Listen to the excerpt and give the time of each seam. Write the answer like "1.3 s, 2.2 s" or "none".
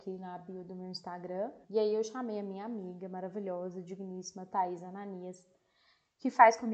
1.6 s